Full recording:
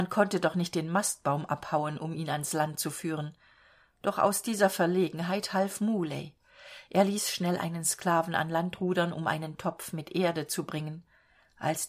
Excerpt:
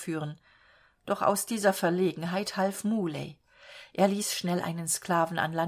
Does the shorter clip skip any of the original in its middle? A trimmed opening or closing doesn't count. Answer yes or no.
no